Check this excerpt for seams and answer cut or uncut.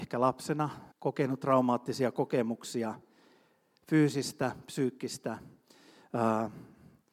cut